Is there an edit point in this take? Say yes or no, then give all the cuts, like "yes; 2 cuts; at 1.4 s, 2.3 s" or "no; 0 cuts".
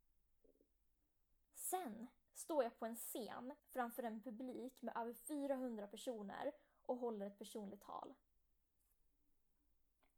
yes; 2 cuts; at 2.3 s, 3.6 s